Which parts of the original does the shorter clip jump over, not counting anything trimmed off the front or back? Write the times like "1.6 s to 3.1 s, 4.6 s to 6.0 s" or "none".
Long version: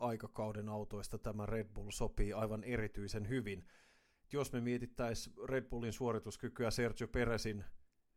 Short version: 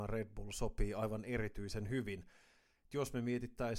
none